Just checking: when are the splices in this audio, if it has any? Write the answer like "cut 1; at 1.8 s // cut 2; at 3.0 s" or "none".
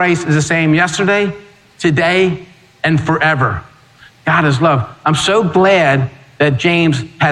cut 1; at 4.1 s